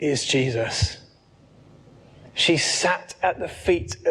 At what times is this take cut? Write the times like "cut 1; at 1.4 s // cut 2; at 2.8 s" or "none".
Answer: cut 1; at 2.3 s